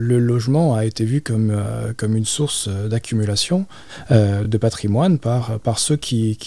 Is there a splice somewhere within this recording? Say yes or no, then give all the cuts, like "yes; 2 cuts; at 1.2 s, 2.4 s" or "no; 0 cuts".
no; 0 cuts